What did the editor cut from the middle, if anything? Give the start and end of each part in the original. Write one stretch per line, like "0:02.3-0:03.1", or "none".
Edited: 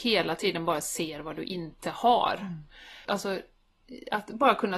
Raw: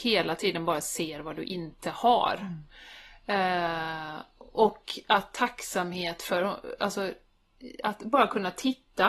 0:03.0-0:06.8